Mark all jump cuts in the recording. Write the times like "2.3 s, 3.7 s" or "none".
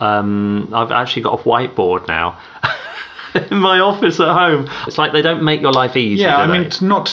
4.9 s